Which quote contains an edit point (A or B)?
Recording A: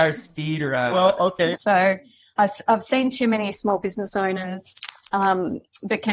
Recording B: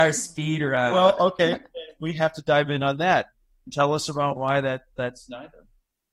A